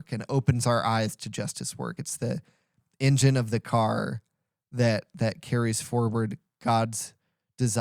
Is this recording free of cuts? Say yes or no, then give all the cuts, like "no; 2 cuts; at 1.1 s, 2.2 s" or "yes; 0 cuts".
yes; 0 cuts